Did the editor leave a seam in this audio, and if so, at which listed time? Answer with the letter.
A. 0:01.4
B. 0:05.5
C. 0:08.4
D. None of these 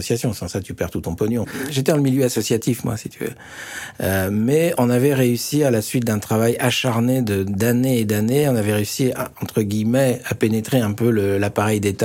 A